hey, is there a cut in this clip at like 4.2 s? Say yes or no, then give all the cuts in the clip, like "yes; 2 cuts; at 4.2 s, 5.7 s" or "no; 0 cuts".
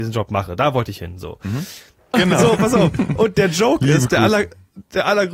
no; 1 cut; at 2.1 s